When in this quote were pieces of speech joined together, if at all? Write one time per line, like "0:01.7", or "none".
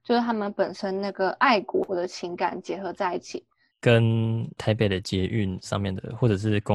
0:03.7